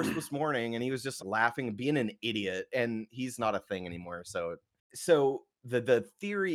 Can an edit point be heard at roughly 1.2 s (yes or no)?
yes